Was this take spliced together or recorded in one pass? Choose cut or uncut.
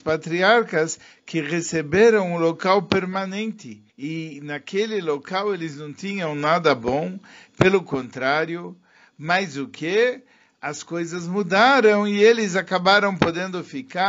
cut